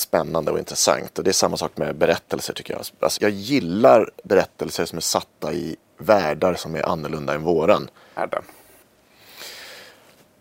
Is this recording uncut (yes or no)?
no